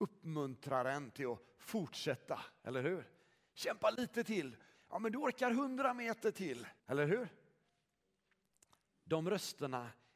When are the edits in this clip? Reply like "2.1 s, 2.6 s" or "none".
4.7 s, 6.8 s

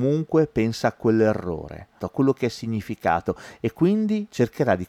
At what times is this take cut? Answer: 2.0 s

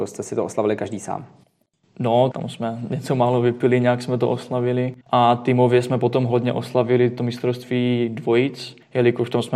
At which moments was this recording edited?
2.3 s, 5.0 s

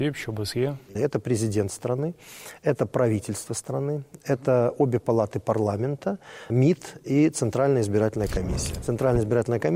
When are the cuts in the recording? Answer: 0.9 s, 6.5 s

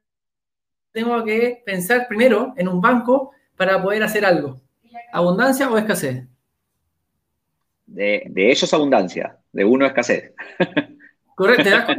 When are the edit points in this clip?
5.1 s, 8.2 s

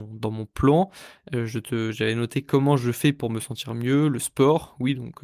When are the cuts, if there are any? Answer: none

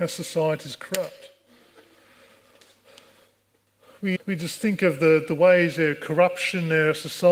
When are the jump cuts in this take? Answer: 4.2 s

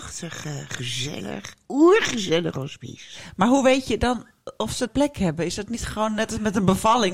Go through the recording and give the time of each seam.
4.9 s

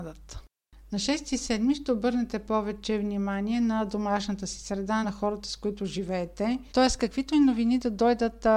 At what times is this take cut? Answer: 5.0 s, 6.7 s

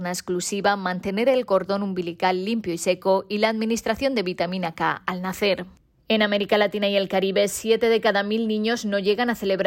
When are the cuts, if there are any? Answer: none

